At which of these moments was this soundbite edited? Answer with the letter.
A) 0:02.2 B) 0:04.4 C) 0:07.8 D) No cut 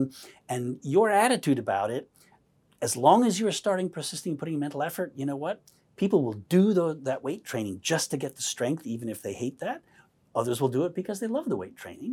D